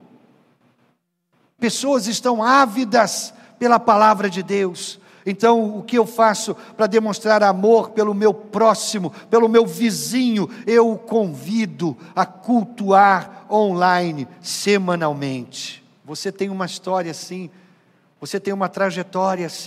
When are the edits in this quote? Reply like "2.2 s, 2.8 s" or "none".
1.6 s, 16.0 s

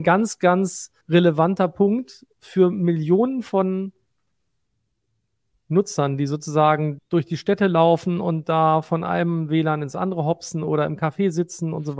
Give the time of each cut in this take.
1.0 s, 7.0 s

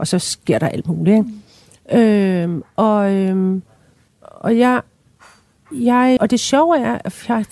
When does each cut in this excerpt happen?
4.1 s, 6.2 s

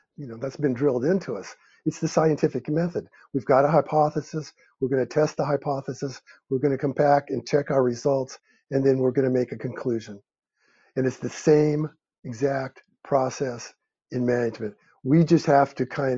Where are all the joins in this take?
none

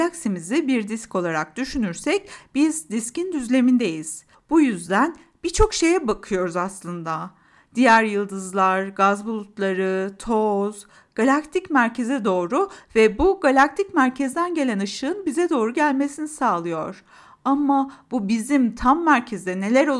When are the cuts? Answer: 4.3 s

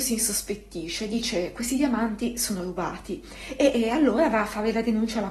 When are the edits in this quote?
none

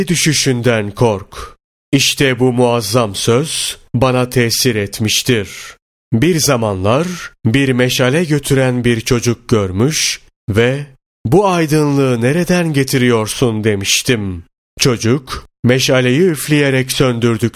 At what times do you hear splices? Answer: none

